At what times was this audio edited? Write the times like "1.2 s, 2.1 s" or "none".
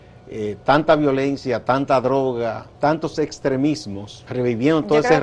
2.7 s, 4.3 s